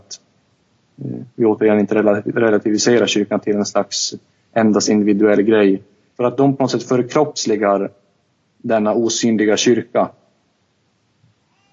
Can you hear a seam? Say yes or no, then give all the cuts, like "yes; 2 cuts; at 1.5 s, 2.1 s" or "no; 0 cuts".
yes; 1 cut; at 6.1 s